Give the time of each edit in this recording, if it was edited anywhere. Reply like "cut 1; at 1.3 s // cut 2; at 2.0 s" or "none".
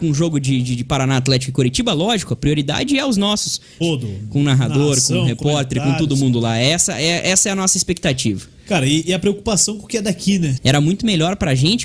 cut 1; at 3.8 s // cut 2; at 10.6 s